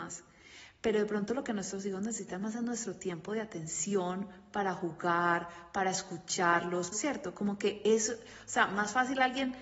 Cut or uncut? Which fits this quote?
cut